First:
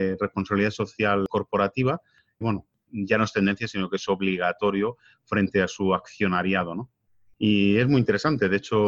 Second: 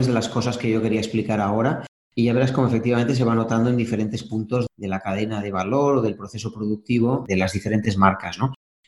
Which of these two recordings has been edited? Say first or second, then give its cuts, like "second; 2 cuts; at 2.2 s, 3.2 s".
first; 1 cut; at 2.4 s